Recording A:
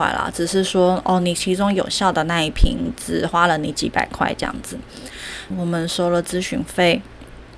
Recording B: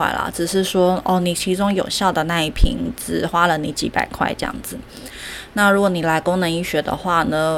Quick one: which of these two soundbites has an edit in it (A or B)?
A